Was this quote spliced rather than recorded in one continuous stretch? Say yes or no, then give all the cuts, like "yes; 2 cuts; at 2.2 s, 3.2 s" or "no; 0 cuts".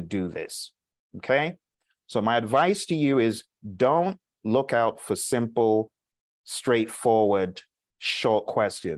no; 0 cuts